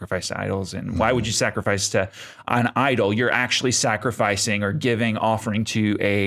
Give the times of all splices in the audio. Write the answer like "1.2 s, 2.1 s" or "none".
none